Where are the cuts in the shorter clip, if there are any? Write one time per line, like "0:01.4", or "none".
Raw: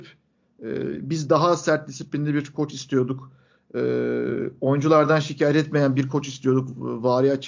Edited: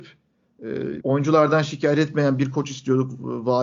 0:01.0